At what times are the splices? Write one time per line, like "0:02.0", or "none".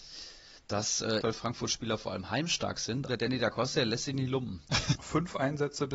0:01.2
0:03.1
0:05.0